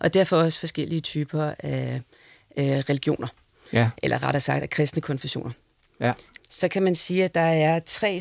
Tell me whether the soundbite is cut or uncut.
cut